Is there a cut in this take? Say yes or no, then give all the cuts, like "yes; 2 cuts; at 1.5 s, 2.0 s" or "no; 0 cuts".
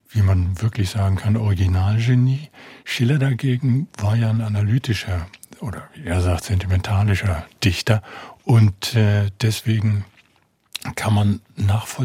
no; 0 cuts